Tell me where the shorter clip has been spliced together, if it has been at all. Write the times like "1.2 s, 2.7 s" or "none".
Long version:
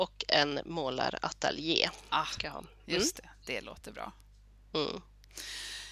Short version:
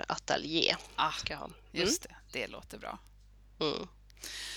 none

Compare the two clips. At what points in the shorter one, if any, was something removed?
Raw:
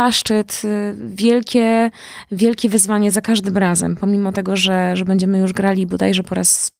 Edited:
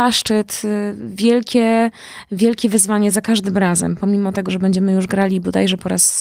4.5 s

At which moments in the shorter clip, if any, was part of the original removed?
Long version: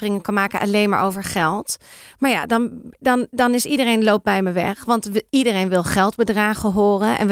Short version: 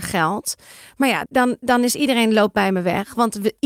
1.3 s

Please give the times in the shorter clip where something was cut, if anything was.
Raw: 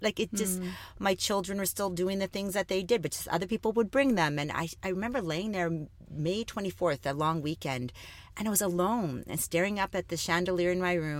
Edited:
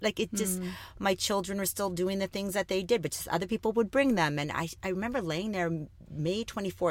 none

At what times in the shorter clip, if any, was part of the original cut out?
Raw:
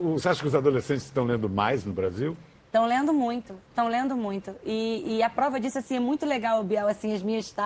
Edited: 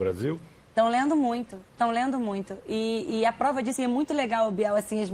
3.8 s

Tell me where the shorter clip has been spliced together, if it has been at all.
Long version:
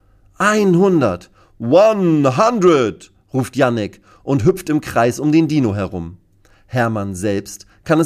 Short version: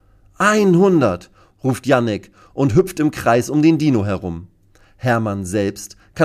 1.5 s

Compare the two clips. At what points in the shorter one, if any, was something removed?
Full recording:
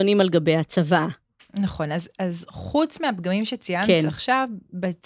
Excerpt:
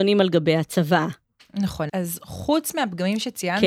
1.9 s

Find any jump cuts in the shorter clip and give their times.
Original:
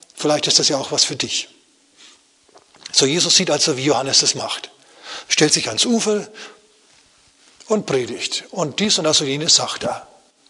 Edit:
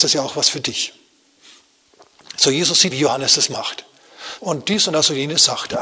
2.9 s, 4.4 s

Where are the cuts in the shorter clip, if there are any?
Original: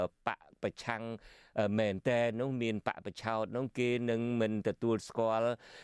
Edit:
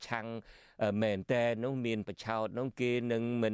2.0 s

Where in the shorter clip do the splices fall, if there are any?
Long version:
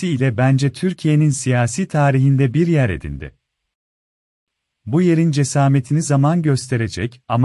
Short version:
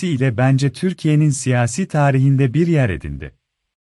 none

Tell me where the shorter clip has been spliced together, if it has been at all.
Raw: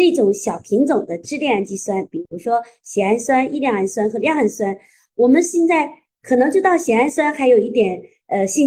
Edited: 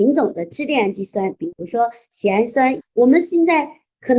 2.8 s

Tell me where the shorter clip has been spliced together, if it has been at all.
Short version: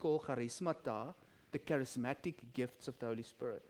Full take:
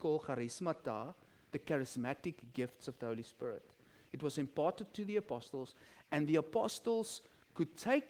none

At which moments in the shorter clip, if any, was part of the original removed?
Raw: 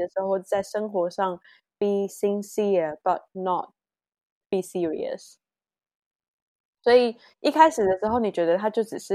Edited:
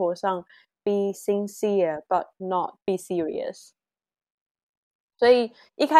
2.8 s

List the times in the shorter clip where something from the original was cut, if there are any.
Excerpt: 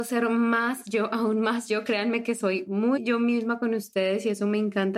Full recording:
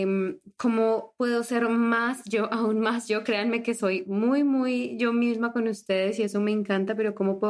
3.0 s

